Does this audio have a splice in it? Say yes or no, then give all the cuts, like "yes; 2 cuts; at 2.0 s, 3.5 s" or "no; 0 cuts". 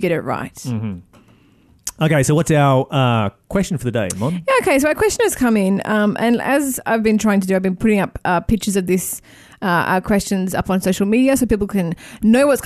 no; 0 cuts